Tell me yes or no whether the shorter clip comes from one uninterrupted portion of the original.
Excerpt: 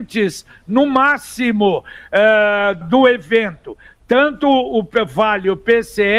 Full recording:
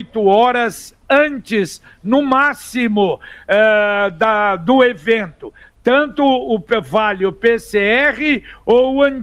no